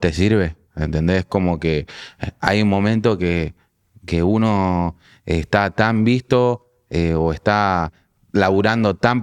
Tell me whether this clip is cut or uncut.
uncut